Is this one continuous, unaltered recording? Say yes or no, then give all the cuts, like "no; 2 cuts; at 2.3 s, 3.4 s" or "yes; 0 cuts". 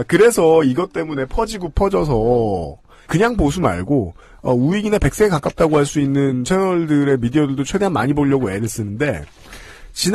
no; 1 cut; at 3.1 s